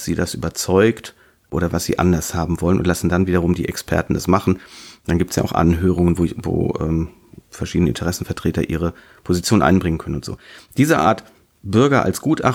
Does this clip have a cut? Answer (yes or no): no